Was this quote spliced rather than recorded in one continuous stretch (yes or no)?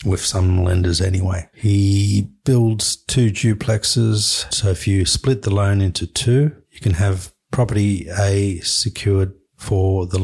yes